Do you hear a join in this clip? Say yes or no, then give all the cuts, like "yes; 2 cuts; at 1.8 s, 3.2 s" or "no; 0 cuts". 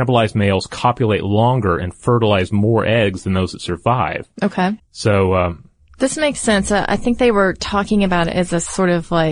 yes; 1 cut; at 4.8 s